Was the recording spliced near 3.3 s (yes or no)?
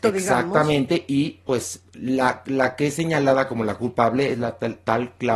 no